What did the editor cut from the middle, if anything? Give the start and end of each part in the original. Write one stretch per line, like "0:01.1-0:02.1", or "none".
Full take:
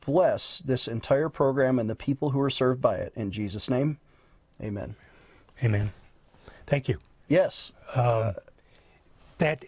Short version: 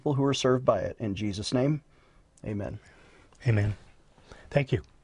none